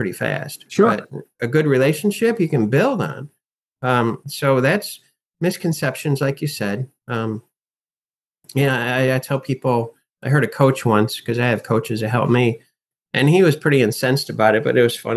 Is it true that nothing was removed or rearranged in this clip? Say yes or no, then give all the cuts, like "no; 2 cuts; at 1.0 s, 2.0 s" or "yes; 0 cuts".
no; 1 cut; at 12.9 s